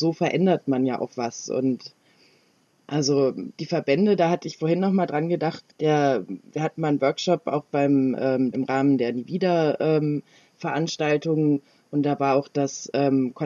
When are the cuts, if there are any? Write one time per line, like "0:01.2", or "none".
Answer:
0:05.7
0:08.5

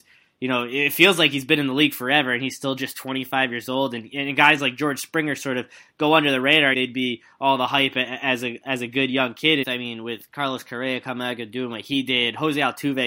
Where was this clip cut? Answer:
0:06.7
0:09.6

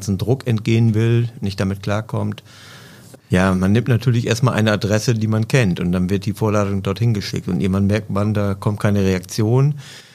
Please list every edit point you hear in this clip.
0:03.2

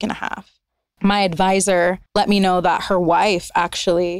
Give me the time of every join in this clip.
0:01.0
0:02.1

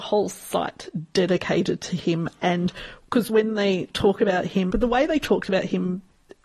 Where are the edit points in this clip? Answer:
0:04.7

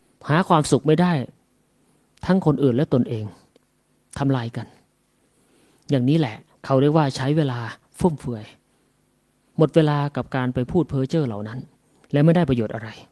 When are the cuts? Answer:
none

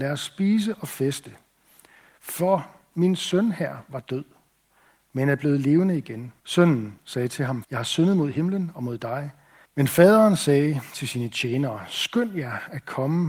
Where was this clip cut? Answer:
0:06.4
0:07.6
0:09.6

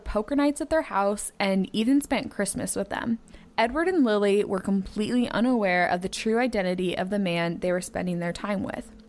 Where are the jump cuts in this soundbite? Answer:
none

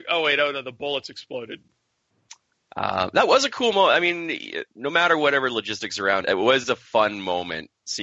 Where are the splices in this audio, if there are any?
0:04.7
0:06.2

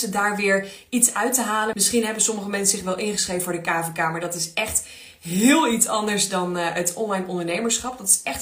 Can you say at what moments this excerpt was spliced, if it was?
0:01.7

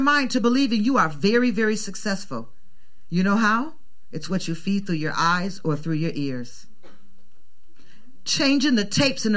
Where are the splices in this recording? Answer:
none

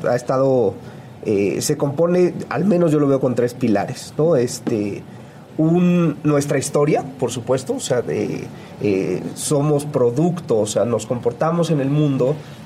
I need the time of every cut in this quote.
none

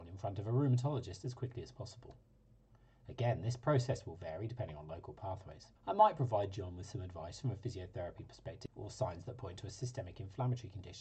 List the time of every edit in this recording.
0:05.8
0:08.7

